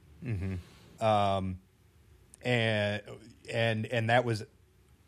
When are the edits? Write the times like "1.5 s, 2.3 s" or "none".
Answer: 1.0 s